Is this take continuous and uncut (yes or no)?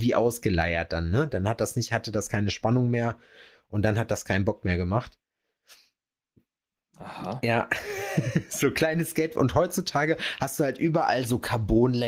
yes